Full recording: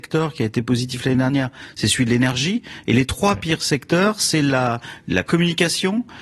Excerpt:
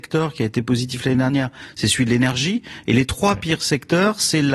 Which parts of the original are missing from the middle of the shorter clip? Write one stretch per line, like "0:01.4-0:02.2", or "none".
none